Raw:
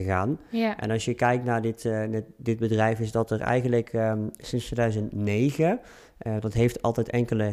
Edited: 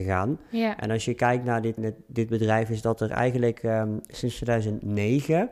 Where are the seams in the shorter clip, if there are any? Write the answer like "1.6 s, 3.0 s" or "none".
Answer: 1.8 s